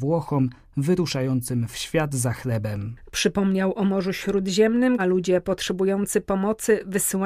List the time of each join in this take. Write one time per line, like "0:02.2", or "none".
0:03.0
0:05.0

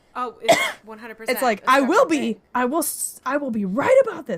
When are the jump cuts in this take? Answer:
none

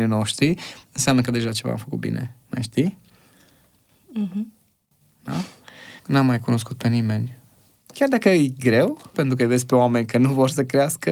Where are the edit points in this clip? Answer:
0:06.0
0:07.7
0:09.1

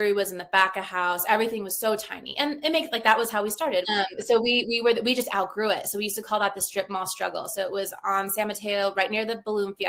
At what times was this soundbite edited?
0:03.8

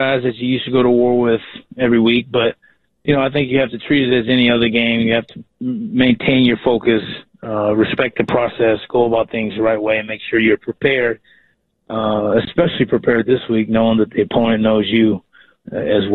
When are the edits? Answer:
none

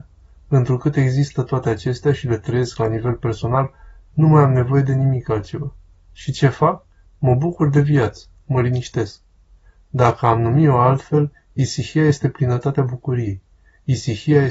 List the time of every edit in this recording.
none

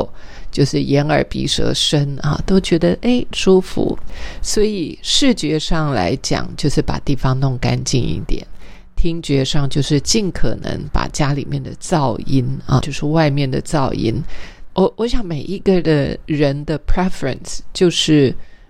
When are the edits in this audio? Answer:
0:14.7

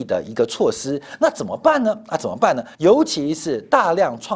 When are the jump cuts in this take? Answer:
0:02.7

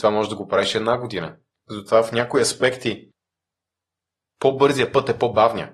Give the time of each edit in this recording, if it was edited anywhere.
0:01.5

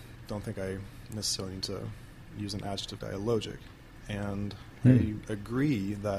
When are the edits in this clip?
0:03.0
0:04.0

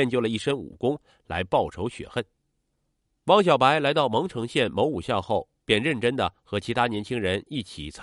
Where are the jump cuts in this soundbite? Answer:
0:03.1

